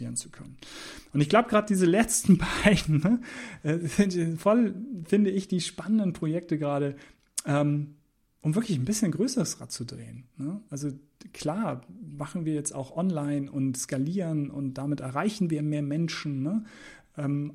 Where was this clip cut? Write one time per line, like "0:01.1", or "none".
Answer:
none